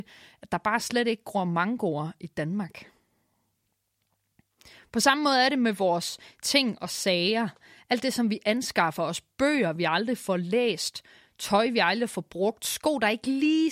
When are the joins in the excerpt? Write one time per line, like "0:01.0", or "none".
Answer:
none